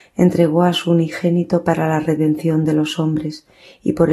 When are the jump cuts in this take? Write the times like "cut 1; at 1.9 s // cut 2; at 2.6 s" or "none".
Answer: none